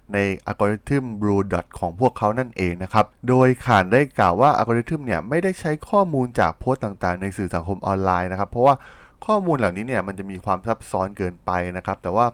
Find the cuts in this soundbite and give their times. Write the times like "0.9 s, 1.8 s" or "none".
none